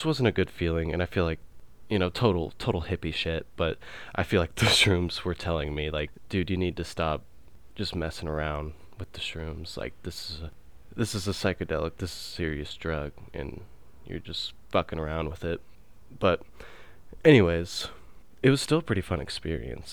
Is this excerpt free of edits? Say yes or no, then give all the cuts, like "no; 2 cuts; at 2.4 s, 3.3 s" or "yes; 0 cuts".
yes; 0 cuts